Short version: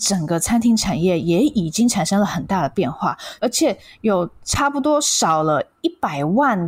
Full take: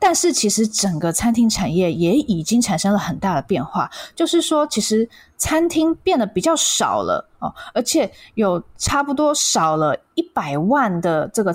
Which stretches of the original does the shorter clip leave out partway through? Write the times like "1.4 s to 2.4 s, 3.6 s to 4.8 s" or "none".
4.1 s to 7.7 s